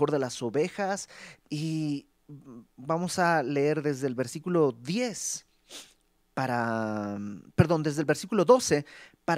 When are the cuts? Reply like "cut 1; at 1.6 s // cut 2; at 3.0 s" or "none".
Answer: cut 1; at 1.5 s